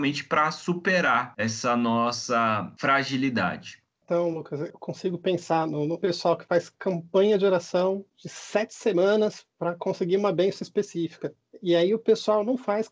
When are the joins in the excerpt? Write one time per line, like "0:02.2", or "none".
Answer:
none